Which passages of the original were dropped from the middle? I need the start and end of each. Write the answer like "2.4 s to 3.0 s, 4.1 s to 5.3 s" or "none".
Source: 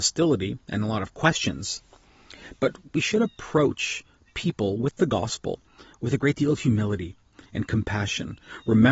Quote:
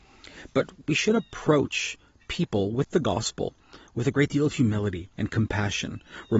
7.2 s to 7.5 s